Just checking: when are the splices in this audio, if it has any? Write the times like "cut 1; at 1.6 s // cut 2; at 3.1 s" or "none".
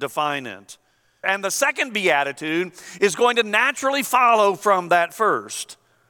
cut 1; at 1.2 s